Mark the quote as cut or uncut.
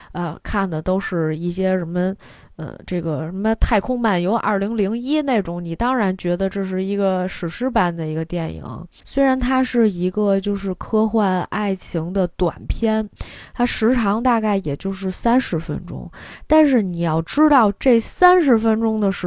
cut